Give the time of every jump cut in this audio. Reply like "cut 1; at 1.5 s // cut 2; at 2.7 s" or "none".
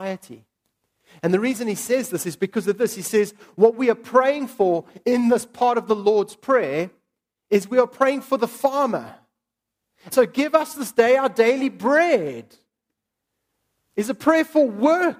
cut 1; at 10.1 s